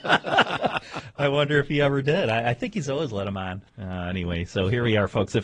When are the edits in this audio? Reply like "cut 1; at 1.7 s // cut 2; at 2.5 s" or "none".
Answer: cut 1; at 3.7 s